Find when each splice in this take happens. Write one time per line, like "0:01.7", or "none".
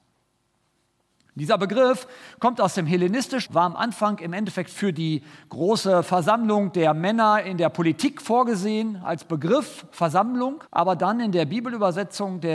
0:03.5
0:10.7